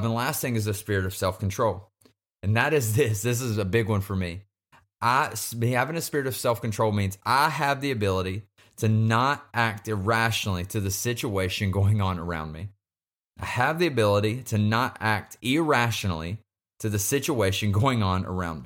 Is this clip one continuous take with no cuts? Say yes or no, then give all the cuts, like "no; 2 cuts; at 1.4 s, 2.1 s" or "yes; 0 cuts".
yes; 0 cuts